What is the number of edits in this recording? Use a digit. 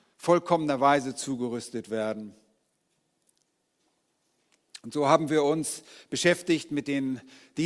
1